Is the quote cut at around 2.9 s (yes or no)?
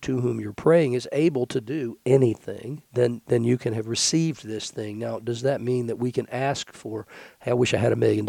yes